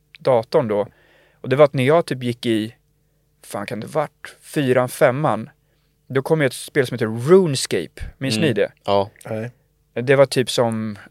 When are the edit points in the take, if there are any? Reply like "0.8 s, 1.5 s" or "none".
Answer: none

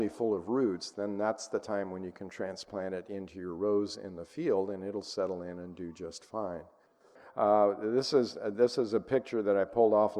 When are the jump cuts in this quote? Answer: none

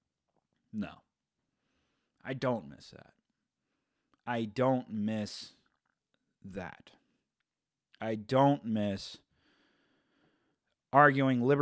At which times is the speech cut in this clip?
none

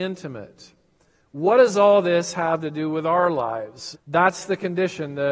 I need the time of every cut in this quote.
3.9 s

